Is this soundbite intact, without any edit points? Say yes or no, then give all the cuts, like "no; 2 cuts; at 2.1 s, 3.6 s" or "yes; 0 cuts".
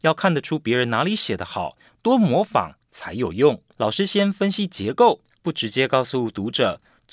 no; 2 cuts; at 3.8 s, 5.3 s